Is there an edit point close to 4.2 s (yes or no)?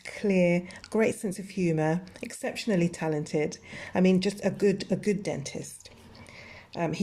no